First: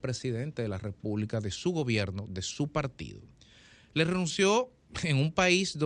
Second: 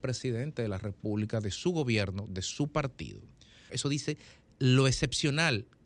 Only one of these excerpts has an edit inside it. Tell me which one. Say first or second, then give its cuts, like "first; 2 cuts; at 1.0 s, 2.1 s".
second; 1 cut; at 3.7 s